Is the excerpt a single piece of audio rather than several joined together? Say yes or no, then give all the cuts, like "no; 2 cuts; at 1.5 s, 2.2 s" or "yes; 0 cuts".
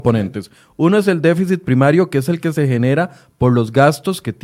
yes; 0 cuts